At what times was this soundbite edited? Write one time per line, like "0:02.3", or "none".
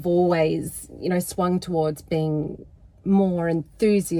none